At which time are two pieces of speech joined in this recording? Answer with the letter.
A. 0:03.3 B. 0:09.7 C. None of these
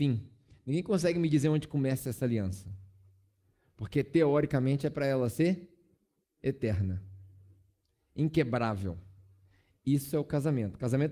C